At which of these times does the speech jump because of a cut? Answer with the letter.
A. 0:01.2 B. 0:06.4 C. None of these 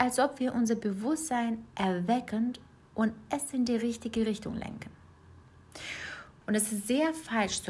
B